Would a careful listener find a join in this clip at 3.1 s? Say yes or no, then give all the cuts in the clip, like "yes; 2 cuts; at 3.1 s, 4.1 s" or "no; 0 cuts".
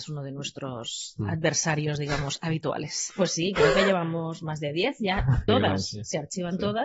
yes; 2 cuts; at 3.1 s, 5.5 s